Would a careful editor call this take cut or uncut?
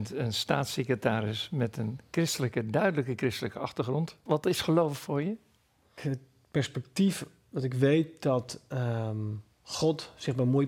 uncut